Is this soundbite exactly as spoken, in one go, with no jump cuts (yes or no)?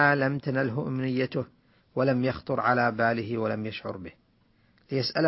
yes